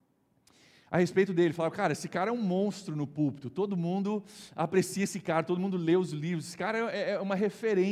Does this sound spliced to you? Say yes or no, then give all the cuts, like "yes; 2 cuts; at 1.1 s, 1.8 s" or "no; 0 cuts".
no; 0 cuts